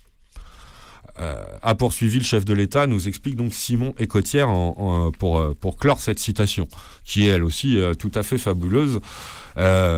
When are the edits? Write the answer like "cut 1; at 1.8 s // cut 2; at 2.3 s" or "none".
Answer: none